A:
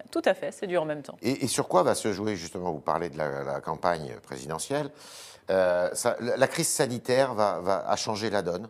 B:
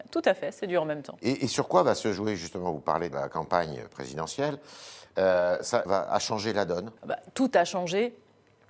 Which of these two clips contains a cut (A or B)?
B